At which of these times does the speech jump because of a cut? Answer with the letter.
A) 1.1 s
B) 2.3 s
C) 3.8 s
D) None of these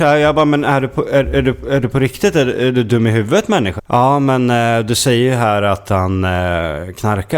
C